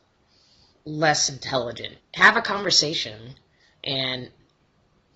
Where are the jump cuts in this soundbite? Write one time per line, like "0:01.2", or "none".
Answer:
0:02.0
0:03.7